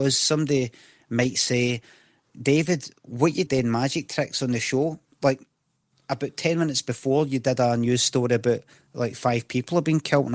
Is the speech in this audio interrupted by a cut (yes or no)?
yes